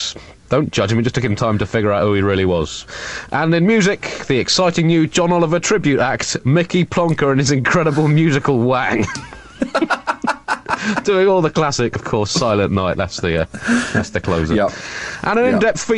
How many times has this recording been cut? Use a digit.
1